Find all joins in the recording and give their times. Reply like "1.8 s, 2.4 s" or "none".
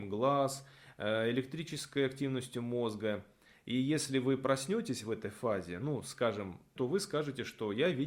6.8 s